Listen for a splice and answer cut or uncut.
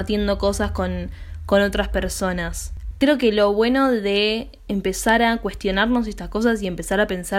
cut